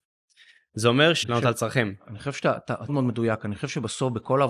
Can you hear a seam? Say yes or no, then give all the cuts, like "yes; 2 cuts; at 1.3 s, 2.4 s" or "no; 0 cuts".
yes; 2 cuts; at 1.2 s, 2.9 s